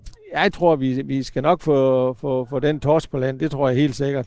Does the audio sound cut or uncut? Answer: uncut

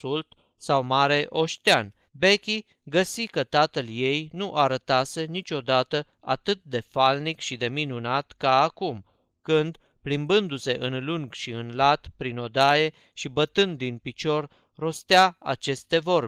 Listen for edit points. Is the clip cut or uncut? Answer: cut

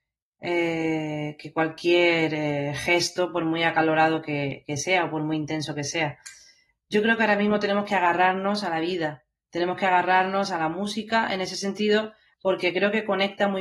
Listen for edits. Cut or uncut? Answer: cut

